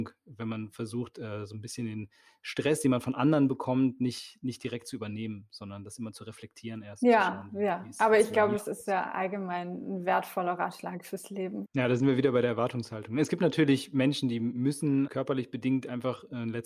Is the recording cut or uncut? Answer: cut